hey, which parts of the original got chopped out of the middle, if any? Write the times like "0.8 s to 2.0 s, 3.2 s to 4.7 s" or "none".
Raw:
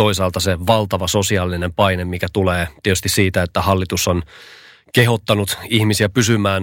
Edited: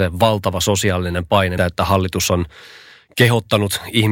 2.0 s to 3.3 s

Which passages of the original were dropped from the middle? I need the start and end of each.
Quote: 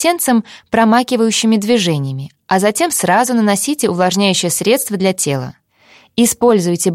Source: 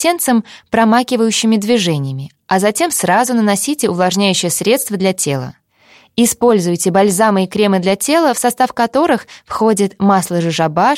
none

